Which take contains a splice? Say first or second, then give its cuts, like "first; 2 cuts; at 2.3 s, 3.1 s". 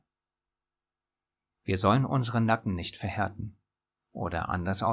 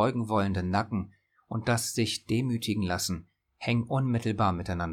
first; 1 cut; at 4.0 s